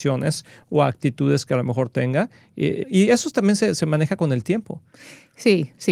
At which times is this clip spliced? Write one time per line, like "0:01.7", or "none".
0:02.8